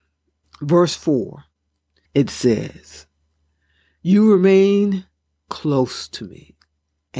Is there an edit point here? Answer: yes; 1 cut; at 2.0 s

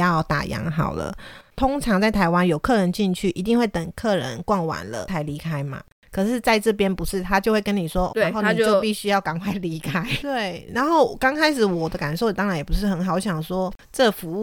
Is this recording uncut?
no; 2 cuts; at 8.1 s, 10.2 s

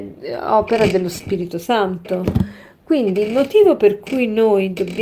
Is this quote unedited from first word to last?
yes; 0 cuts

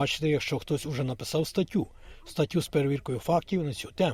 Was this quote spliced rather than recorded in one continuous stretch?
no; 0 cuts

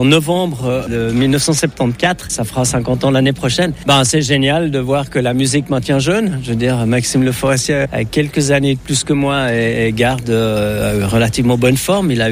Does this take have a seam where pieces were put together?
no; 0 cuts

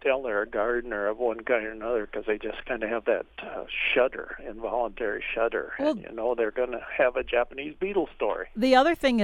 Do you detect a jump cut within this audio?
no; 0 cuts

